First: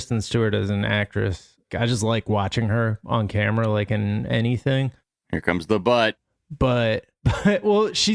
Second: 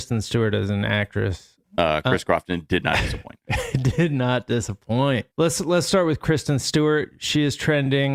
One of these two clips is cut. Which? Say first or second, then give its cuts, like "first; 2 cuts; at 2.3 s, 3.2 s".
second; 2 cuts; at 1.6 s, 5.3 s